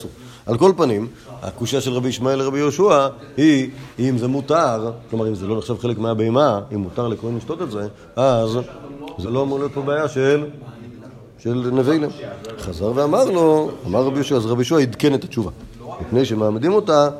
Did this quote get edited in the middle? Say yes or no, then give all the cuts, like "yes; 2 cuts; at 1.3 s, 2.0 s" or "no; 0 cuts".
yes; 1 cut; at 9.2 s